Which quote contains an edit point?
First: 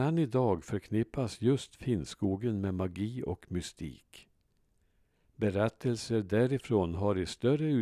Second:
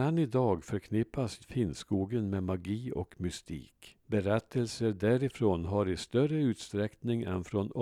second; 2 cuts; at 1.4 s, 4.0 s

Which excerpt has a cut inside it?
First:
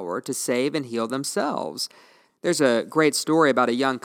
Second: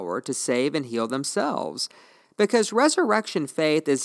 first; 1 cut; at 2.3 s

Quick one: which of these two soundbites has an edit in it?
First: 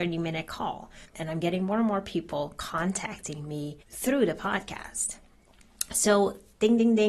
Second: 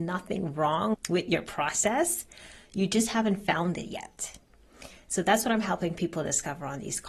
first; 2 cuts; at 1.1 s, 3.8 s

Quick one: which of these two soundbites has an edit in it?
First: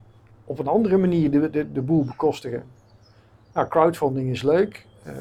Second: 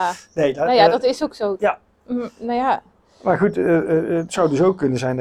second; 1 cut; at 1.6 s

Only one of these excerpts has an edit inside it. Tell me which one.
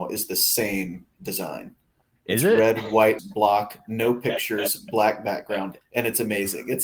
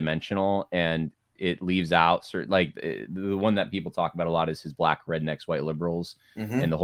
first; 2 cuts; at 3.2 s, 5.8 s

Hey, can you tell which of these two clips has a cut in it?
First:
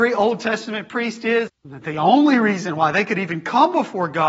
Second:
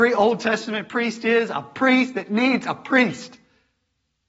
first; 1 cut; at 1.5 s

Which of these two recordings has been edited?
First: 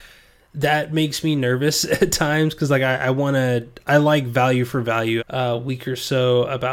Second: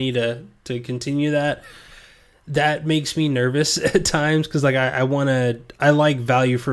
first; 1 cut; at 5.2 s

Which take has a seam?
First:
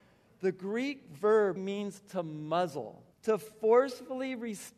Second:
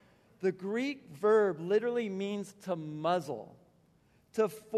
first; 2 cuts; at 1.6 s, 3.1 s

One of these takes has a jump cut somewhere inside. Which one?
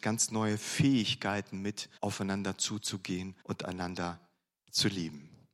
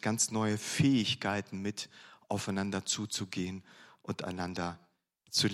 first; 2 cuts; at 2.0 s, 3.4 s

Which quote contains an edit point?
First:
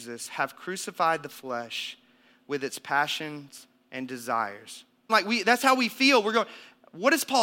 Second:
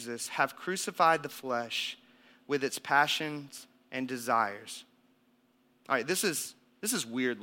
first; 1 cut; at 5.1 s

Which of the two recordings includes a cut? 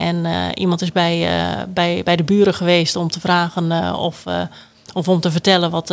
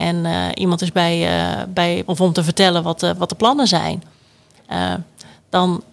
second; 2 cuts; at 2.1 s, 3.2 s

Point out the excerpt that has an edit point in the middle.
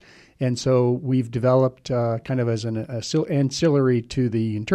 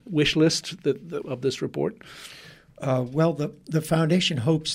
second; 1 cut; at 1.2 s

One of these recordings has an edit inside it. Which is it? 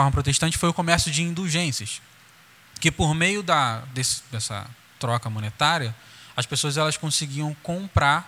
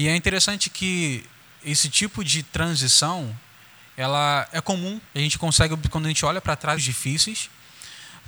second; 2 cuts; at 5.1 s, 6.8 s

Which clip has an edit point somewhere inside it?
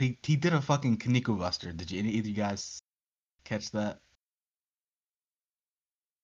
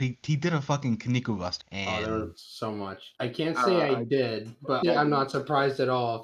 second; 3 cuts; at 1.6 s, 3.2 s, 4.8 s

